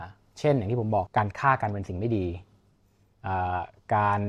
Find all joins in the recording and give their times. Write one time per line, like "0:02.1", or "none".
0:01.1